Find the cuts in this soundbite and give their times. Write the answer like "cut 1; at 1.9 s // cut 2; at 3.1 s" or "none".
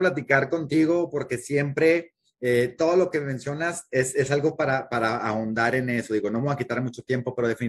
none